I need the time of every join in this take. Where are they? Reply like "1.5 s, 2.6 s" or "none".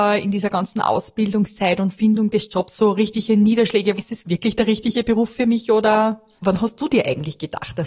4.0 s, 6.4 s